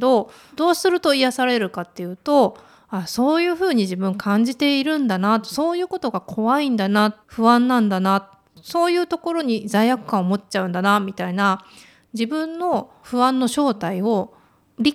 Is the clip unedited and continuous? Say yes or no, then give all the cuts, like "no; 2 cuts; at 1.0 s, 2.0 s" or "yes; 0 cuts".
no; 1 cut; at 7.2 s